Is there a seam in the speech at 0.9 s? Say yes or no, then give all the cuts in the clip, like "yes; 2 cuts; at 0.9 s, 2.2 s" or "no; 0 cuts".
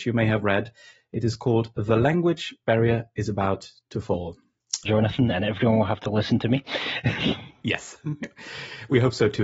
no; 1 cut; at 4.9 s